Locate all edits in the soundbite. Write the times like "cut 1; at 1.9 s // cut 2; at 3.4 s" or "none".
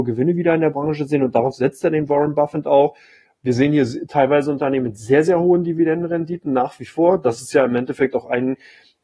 none